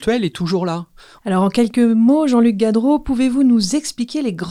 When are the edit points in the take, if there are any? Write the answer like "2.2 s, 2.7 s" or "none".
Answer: 1.2 s